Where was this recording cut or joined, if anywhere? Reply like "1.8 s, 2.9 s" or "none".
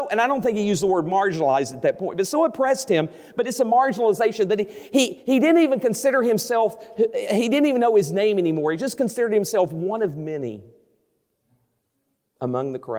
none